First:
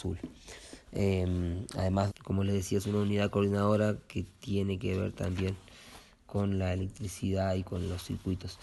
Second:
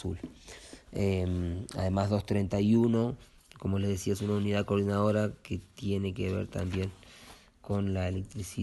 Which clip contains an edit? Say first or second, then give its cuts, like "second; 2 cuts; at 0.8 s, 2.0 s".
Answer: first; 1 cut; at 2.1 s